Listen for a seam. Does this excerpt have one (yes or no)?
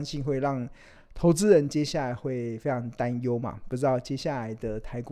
no